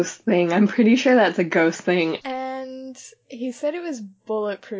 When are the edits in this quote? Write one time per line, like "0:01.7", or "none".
0:02.2